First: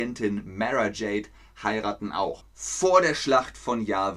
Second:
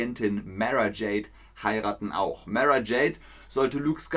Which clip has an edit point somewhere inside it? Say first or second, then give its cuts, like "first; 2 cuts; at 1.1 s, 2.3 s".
first; 1 cut; at 2.4 s